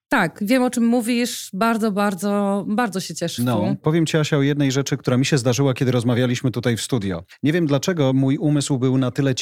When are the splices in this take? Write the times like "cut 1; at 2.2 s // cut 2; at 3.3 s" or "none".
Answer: cut 1; at 3.4 s